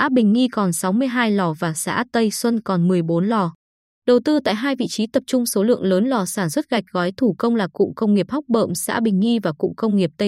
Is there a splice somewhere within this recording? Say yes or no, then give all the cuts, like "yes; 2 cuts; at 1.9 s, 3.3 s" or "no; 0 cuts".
yes; 1 cut; at 3.9 s